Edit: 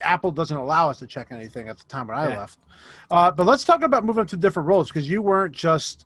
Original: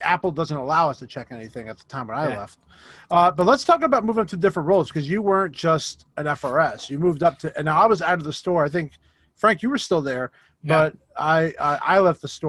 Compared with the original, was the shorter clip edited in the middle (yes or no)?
no